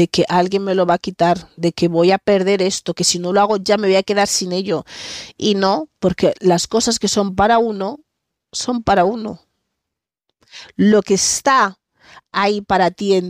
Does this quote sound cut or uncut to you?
uncut